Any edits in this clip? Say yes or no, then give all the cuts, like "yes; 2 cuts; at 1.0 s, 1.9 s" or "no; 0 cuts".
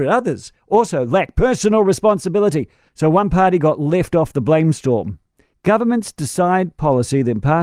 yes; 1 cut; at 2.9 s